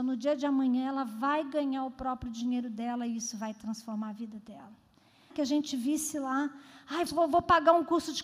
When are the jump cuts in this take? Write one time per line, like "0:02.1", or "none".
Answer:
0:05.3
0:07.1